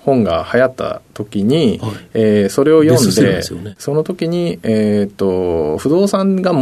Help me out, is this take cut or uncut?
cut